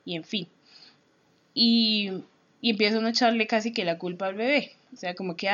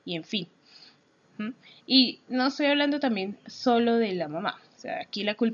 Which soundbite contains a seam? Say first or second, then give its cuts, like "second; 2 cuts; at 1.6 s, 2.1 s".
second; 1 cut; at 1.2 s